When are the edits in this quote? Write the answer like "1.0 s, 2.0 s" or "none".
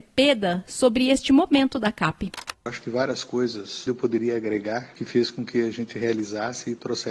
3.9 s